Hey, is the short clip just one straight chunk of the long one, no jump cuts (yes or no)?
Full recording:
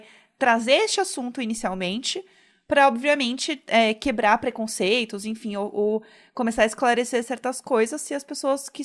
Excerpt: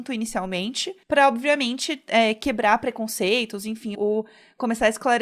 no